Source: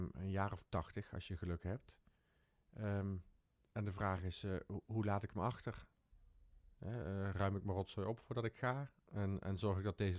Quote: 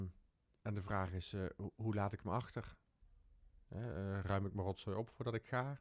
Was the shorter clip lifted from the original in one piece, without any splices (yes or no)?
yes